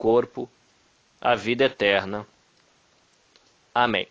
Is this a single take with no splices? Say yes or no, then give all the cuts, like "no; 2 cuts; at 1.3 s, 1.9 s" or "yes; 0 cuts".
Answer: yes; 0 cuts